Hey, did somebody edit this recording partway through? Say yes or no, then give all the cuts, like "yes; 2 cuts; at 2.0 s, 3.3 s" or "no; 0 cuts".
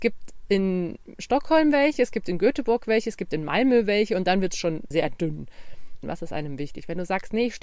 yes; 2 cuts; at 4.9 s, 6.0 s